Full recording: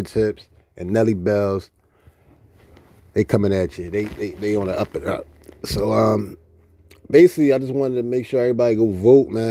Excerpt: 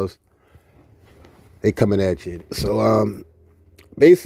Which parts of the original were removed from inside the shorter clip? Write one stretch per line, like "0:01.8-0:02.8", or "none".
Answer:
0:03.9-0:05.5